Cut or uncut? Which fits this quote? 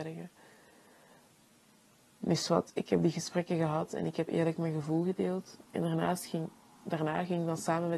uncut